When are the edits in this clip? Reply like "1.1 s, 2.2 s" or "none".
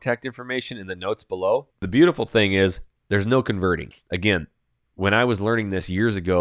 1.7 s, 3.9 s